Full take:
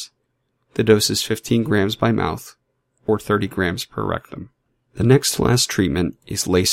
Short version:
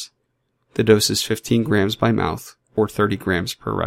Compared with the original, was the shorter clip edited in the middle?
yes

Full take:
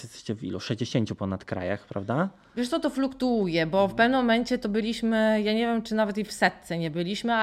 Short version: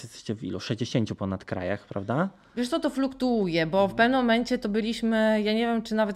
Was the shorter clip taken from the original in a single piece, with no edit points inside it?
yes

